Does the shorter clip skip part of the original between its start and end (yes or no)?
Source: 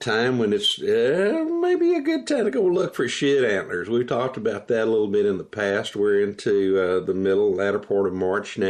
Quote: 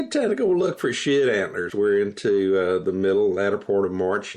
yes